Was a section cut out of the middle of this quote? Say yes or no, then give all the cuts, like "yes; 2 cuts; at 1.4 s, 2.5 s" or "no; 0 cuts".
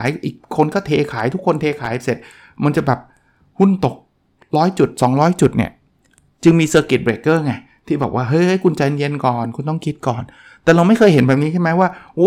no; 0 cuts